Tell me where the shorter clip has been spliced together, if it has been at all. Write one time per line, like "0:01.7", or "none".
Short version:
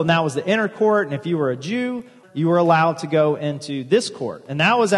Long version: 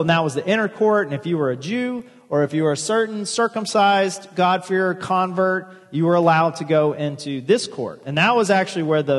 0:02.2